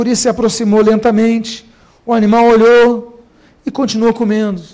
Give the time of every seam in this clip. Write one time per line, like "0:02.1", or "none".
none

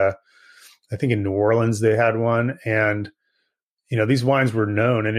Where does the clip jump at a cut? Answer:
none

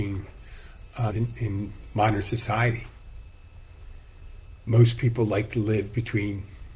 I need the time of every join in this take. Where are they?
0:01.1

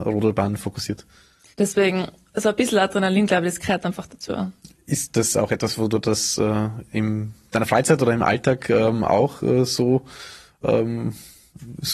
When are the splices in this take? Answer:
0:01.5

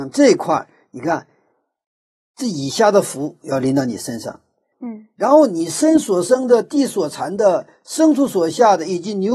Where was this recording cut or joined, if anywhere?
0:04.7

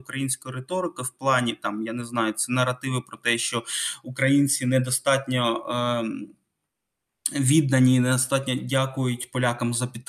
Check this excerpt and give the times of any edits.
none

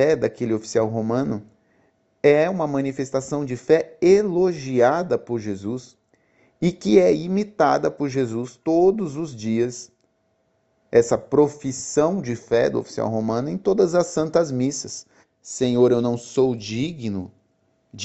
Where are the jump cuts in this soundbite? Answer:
0:15.2

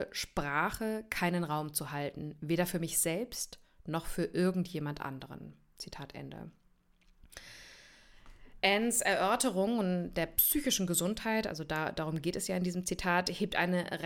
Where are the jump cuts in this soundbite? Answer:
none

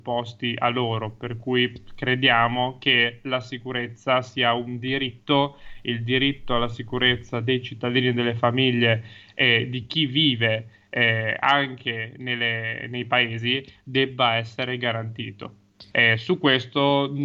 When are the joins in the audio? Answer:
0:15.9

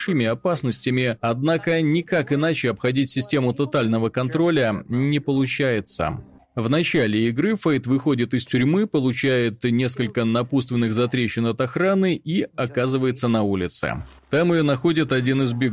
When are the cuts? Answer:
none

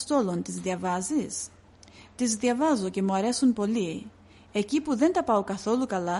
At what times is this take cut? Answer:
none

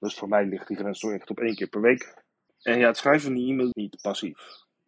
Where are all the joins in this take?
0:02.5
0:03.7

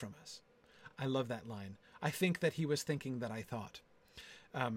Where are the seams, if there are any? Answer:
none

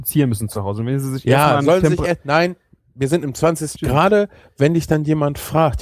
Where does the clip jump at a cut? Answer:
0:03.8

